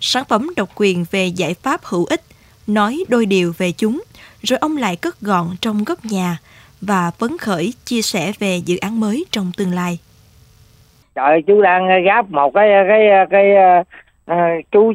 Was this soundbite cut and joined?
yes; 1 cut; at 2.5 s

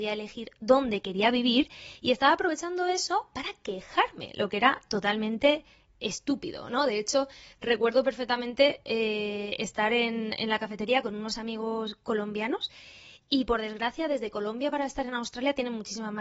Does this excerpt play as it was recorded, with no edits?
yes; 0 cuts

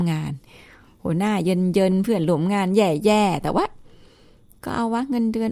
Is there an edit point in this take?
no; 0 cuts

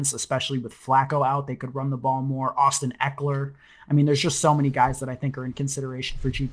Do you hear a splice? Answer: no; 0 cuts

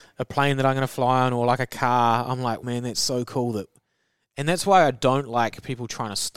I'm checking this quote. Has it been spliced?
yes; 1 cut; at 2.6 s

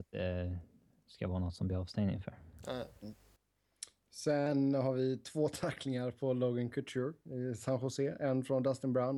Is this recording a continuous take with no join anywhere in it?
yes; 0 cuts

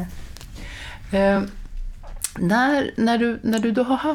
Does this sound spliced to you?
no; 0 cuts

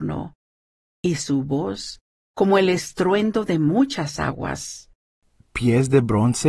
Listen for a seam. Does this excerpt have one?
no; 0 cuts

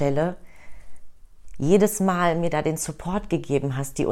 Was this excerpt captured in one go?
yes; 0 cuts

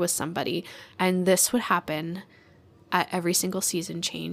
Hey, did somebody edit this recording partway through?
yes; 1 cut; at 0.9 s

